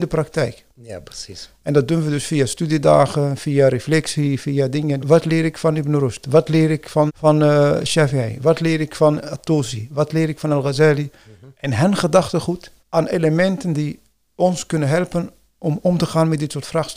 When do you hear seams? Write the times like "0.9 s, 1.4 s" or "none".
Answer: 5.0 s, 7.1 s, 12.8 s